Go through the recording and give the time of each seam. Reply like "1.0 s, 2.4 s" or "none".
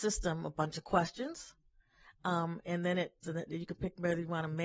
3.2 s